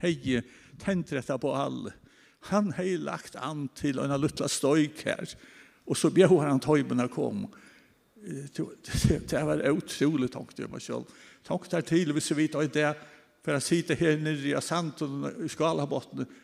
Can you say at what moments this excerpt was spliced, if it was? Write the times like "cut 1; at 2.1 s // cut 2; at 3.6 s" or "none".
none